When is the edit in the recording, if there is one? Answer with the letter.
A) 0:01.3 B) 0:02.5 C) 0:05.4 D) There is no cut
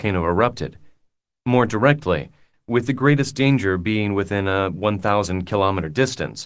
B